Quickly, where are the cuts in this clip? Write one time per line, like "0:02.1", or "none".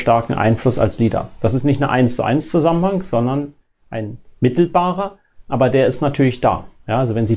none